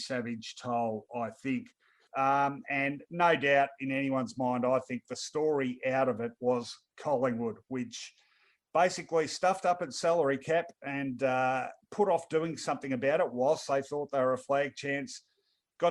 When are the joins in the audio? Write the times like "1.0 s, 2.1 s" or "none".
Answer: 2.1 s